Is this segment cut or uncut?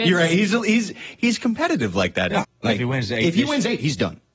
cut